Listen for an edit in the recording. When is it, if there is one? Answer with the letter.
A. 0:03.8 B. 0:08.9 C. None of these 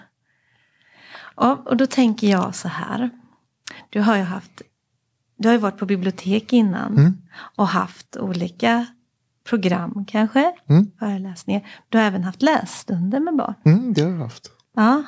C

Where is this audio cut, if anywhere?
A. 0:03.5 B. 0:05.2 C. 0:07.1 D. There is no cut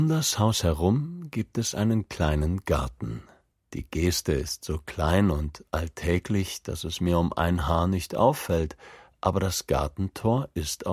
A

